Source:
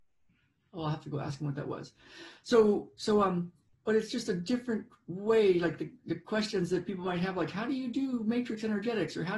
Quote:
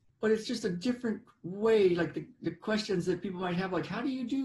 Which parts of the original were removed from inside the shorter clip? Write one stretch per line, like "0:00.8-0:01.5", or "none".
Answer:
none